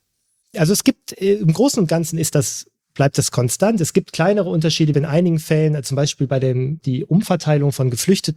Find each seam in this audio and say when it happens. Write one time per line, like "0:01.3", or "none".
0:04.9
0:06.8